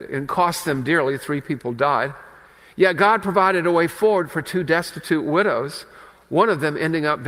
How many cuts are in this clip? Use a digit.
0